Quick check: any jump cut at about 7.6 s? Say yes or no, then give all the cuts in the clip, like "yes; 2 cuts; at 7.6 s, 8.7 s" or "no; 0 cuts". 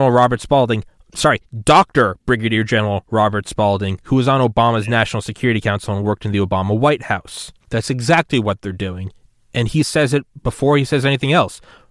yes; 1 cut; at 7.6 s